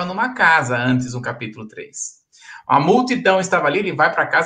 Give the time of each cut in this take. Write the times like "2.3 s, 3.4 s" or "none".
none